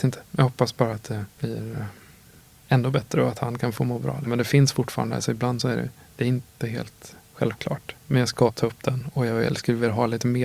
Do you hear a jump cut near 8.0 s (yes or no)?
no